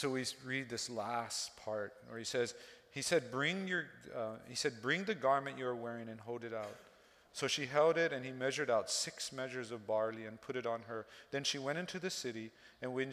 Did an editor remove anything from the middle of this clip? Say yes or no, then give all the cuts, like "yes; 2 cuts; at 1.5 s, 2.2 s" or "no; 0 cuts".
no; 0 cuts